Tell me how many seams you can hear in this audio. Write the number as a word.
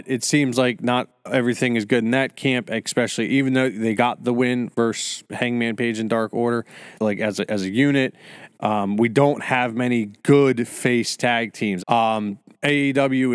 three